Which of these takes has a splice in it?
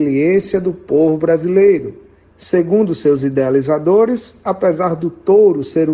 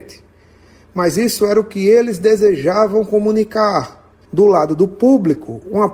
second; 1 cut; at 4.2 s

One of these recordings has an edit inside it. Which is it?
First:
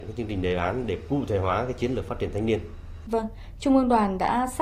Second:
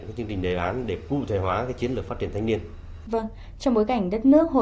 first; 1 cut; at 3.6 s

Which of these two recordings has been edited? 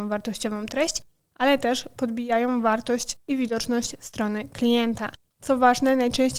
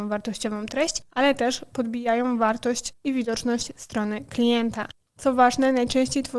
second; 1 cut; at 1.1 s

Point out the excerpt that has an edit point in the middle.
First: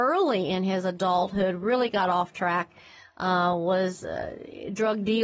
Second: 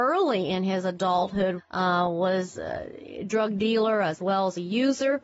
second; 1 cut; at 1.6 s

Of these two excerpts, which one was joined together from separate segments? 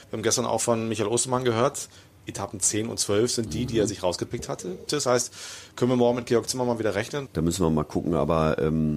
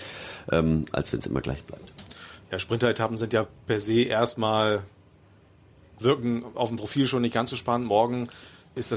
first; 2 cuts; at 4.9 s, 7.2 s

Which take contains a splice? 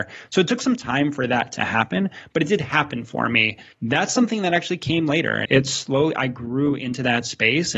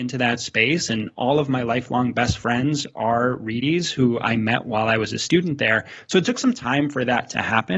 first; 2 cuts; at 3.7 s, 5.5 s

